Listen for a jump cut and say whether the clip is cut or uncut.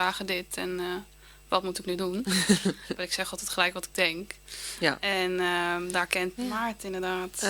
cut